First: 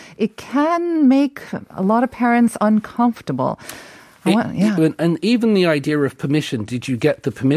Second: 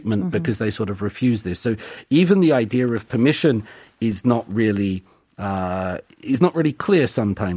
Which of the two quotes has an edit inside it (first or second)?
first